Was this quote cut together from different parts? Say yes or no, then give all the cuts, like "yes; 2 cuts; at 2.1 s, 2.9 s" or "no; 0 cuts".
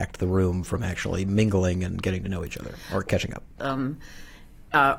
yes; 1 cut; at 3.6 s